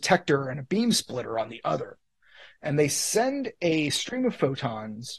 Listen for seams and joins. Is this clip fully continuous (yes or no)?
yes